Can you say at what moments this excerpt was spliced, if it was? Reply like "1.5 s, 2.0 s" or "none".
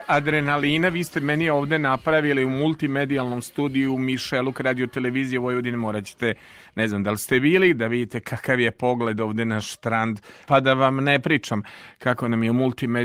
10.5 s

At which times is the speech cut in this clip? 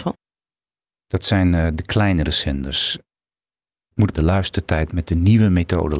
4.1 s

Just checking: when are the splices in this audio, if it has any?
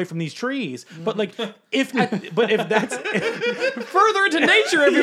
none

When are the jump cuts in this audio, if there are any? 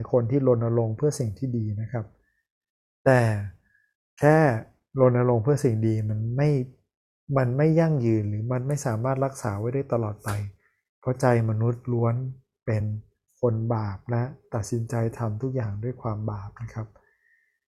none

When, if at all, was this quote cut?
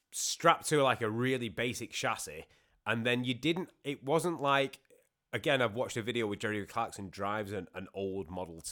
none

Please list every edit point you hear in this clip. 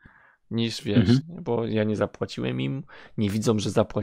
1.2 s

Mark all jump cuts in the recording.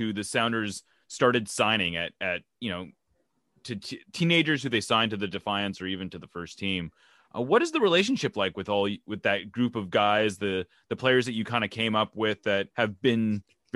12.7 s

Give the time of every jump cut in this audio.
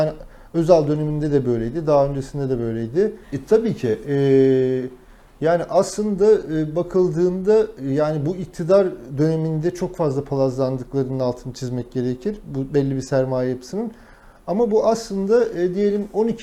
3.2 s

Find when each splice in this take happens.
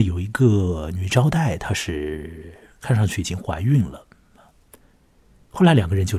none

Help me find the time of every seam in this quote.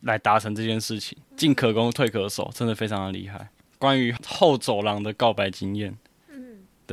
1.2 s

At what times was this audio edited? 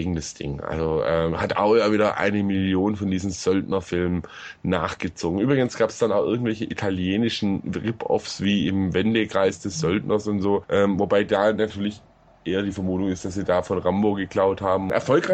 none

